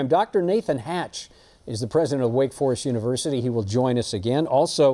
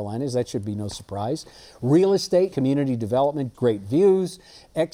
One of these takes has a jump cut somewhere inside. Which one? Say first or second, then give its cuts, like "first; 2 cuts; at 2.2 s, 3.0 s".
second; 2 cuts; at 2.5 s, 3.5 s